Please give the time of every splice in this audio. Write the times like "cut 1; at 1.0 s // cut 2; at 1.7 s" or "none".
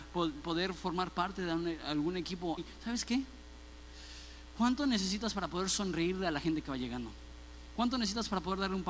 cut 1; at 2.6 s